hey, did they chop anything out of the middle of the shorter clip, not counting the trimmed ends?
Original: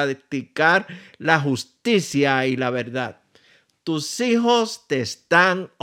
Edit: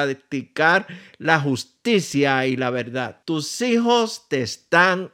yes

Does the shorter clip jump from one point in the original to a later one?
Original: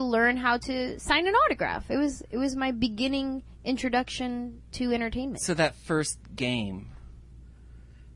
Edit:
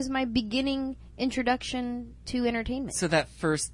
no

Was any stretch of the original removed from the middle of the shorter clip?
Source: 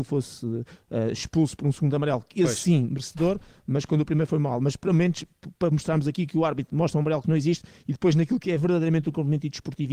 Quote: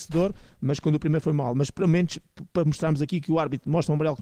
no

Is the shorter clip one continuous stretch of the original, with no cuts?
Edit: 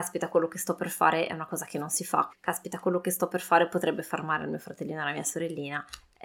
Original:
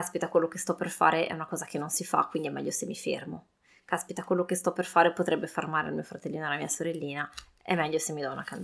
no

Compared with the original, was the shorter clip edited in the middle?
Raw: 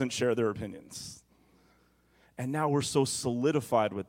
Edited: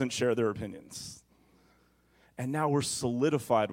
yes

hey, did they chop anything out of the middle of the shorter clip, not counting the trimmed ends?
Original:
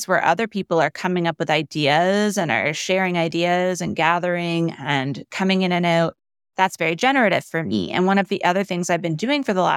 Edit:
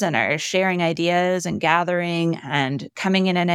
no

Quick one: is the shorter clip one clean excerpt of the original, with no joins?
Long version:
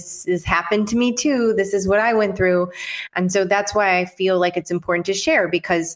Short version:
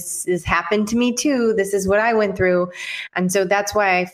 yes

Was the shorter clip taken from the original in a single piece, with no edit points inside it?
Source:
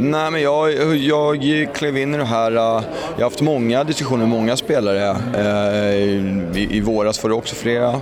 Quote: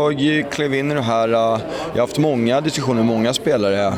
yes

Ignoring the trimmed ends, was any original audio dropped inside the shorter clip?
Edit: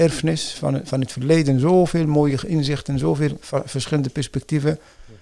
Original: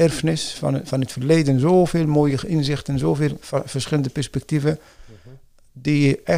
no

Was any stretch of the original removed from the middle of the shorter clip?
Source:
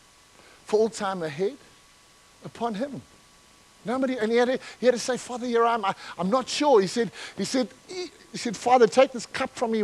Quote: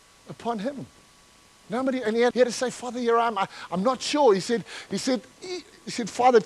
yes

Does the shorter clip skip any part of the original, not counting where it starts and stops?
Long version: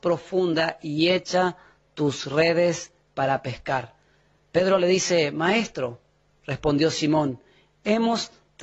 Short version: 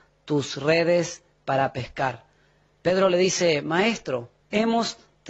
yes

